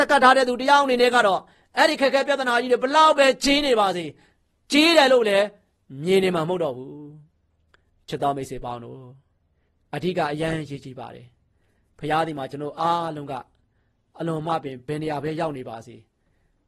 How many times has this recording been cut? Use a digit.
0